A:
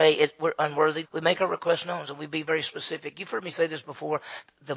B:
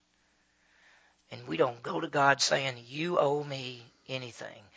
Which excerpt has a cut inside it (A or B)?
A